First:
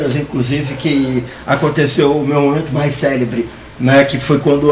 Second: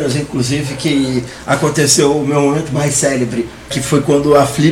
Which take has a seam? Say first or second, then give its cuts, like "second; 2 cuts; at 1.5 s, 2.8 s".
second; 1 cut; at 3.7 s